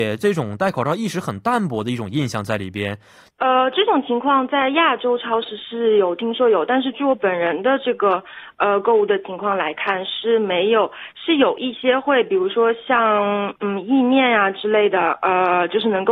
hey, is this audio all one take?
no; 1 cut; at 3.3 s

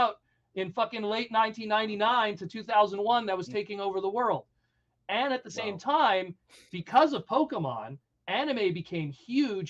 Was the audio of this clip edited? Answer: no; 0 cuts

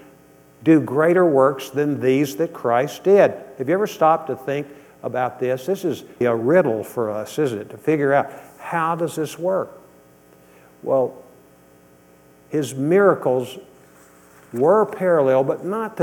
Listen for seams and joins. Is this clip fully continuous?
no; 1 cut; at 6.2 s

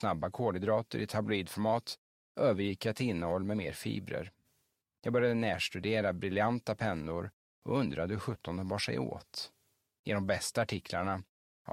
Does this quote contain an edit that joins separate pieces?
no; 0 cuts

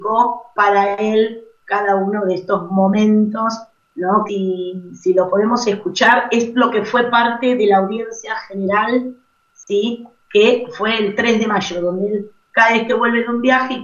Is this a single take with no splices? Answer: no; 1 cut; at 4.3 s

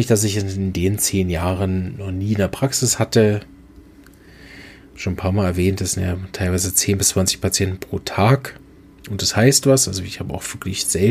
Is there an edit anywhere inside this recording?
no; 0 cuts

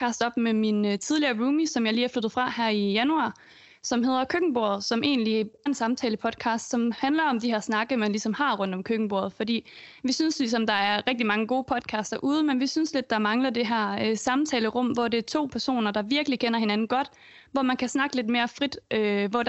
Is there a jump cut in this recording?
yes; 1 cut; at 5.7 s

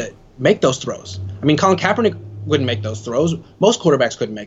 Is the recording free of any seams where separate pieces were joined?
yes; 0 cuts

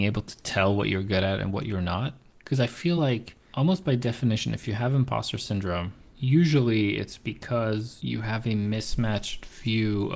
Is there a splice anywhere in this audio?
no; 0 cuts

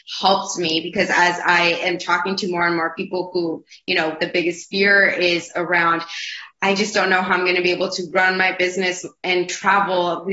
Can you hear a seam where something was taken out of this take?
yes; 1 cut; at 4.2 s

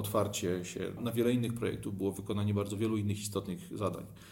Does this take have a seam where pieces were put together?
yes; 1 cut; at 1.0 s

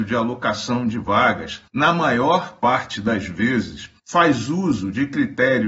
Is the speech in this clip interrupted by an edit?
yes; 2 cuts; at 1.7 s, 4.0 s

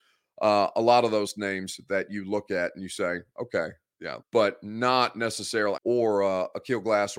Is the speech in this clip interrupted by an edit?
yes; 2 cuts; at 4.2 s, 5.8 s

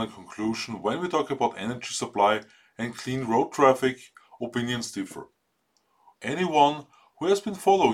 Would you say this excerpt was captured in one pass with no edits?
no; 1 cut; at 6.2 s

